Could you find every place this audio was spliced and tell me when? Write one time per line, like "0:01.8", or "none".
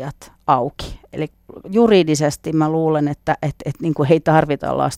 none